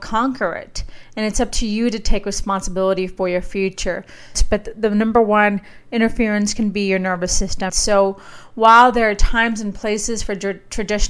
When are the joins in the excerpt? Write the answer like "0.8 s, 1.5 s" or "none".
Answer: 4.3 s, 7.7 s